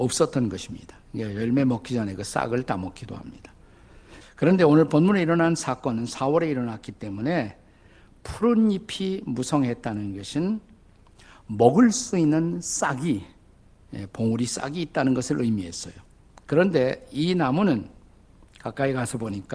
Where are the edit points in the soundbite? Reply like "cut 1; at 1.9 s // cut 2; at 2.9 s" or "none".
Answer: cut 1; at 4.2 s